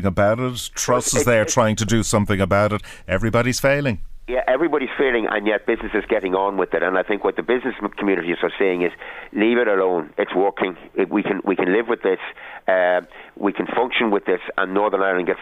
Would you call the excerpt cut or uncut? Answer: uncut